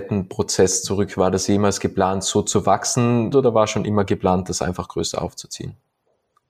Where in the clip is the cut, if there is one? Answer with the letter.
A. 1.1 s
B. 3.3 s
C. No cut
B